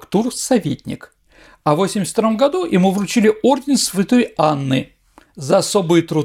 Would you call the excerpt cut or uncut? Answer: uncut